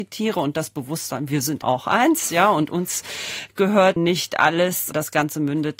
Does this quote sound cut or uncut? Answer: cut